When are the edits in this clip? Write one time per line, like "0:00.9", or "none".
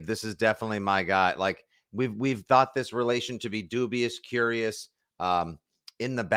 none